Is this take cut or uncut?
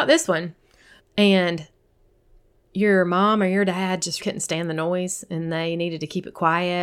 cut